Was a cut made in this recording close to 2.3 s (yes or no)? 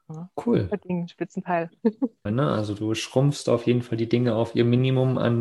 yes